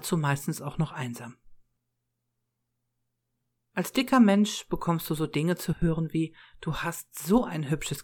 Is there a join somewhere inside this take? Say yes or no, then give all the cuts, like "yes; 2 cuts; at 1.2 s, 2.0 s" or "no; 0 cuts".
no; 0 cuts